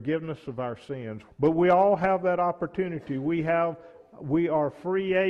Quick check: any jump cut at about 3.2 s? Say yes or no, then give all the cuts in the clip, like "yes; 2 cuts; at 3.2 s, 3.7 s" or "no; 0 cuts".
no; 1 cut; at 1.3 s